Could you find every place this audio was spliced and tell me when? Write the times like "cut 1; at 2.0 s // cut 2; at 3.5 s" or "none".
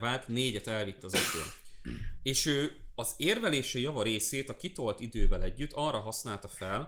none